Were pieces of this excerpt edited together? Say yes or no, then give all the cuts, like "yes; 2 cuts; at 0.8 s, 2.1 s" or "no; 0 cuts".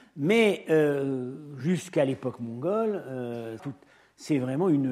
yes; 1 cut; at 3.6 s